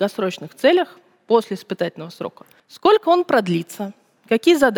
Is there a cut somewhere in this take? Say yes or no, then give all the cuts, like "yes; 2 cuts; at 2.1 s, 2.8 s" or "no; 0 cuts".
yes; 1 cut; at 2.6 s